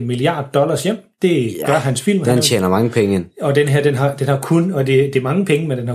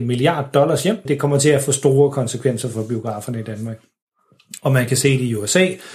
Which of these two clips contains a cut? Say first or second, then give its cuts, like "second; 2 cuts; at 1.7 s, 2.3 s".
second; 1 cut; at 1.1 s